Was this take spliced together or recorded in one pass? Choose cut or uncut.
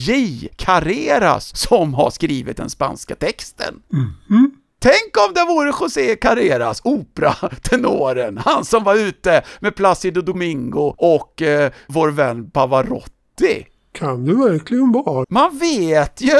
cut